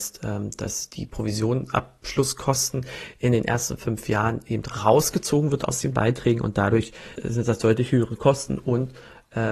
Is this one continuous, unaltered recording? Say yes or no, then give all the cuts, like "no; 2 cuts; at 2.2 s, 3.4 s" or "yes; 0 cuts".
no; 1 cut; at 7.2 s